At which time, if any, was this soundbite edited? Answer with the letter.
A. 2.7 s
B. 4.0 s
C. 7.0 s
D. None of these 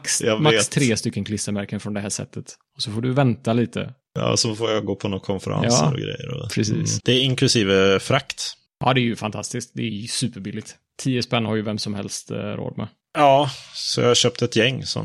C